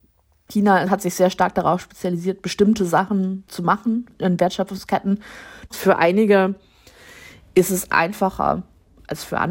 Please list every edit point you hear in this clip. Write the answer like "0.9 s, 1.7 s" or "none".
3.5 s, 5.7 s

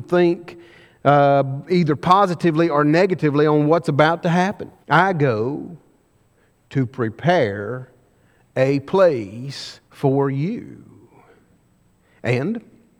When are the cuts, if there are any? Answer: 4.8 s, 9.8 s

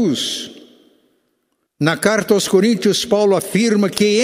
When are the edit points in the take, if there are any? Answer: 1.7 s

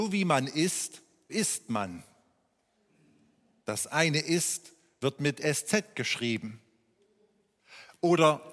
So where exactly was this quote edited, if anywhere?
1.3 s

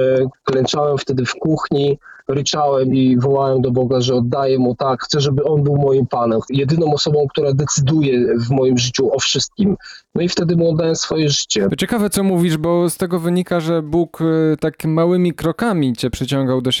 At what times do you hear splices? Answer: none

